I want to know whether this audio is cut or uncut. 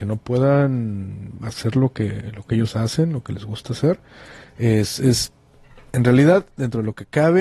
uncut